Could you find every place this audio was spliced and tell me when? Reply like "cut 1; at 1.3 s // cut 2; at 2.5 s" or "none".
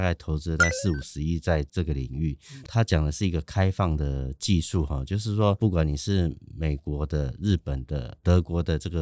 cut 1; at 2.6 s